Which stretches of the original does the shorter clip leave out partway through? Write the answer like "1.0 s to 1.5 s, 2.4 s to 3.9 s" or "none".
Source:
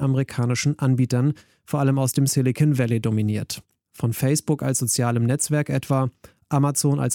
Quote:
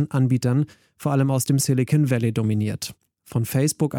none

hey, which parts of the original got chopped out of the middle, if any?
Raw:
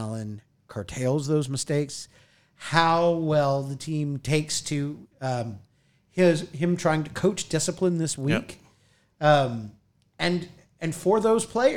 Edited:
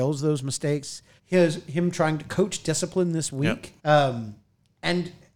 2.2 s to 6.0 s, 8.6 s to 9.1 s

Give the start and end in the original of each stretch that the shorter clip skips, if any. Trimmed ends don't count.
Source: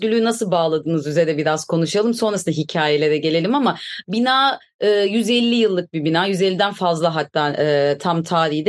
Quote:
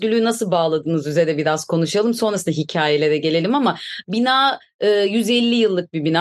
none

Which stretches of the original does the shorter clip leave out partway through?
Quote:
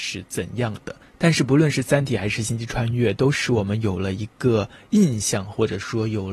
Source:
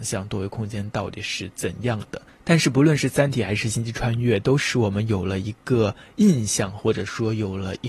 none

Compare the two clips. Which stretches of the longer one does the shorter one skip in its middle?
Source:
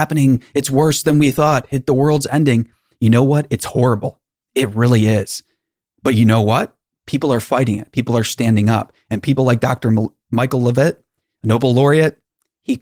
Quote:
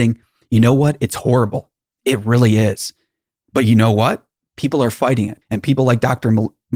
7.9 s to 9.0 s

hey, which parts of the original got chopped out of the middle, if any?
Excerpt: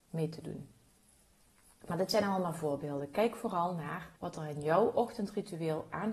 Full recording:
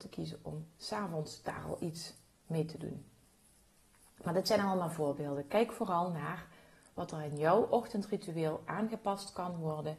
6.5 s to 6.9 s

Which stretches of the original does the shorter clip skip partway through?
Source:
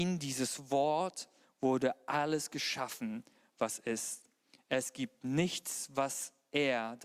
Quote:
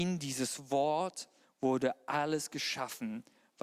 none

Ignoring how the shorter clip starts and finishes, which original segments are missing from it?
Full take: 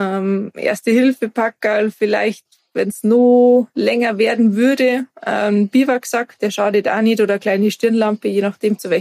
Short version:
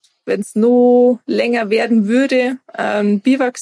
none

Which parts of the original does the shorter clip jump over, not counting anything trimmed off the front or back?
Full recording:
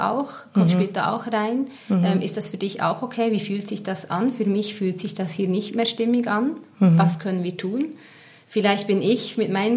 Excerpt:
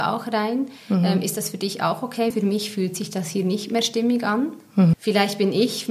3.3 s to 4.3 s, 7.0 s to 8.4 s

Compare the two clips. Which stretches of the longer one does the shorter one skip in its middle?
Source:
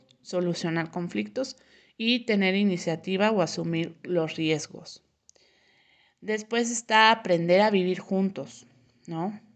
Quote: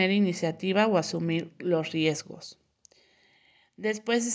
none

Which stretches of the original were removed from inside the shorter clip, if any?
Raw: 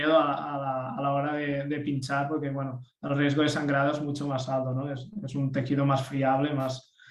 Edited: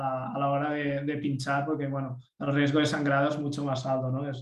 none

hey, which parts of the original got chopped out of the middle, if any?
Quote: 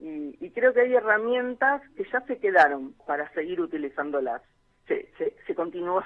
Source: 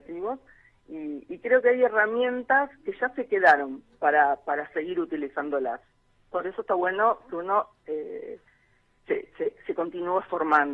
3.9 s to 4.4 s, 6.1 s to 8.9 s

